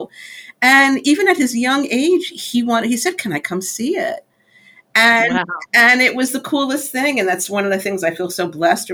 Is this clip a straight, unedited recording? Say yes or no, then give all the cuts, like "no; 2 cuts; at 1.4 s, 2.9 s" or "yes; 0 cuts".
yes; 0 cuts